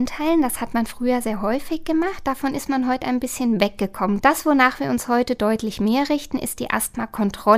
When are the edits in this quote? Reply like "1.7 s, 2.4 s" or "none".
4.2 s